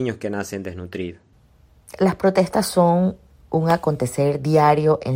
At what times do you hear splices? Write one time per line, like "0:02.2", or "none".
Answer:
none